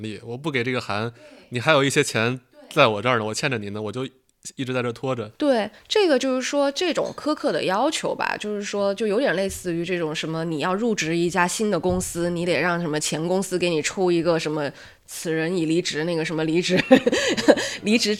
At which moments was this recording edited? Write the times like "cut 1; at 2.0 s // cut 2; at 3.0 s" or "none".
none